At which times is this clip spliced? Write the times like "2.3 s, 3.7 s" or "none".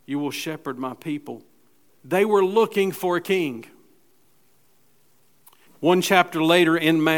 1.9 s, 5.7 s